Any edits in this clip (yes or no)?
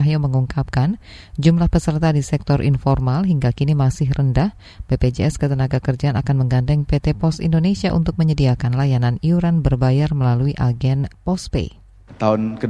no